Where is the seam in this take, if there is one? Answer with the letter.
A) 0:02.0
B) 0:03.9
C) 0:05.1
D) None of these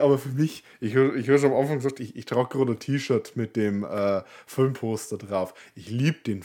A